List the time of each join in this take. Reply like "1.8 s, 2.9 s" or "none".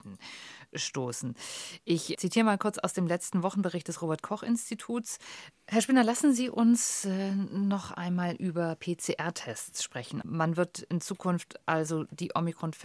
2.1 s, 5.5 s, 10.2 s